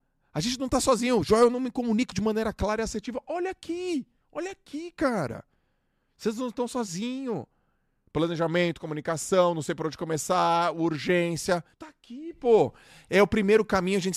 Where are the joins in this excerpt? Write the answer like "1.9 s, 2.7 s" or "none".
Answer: 11.7 s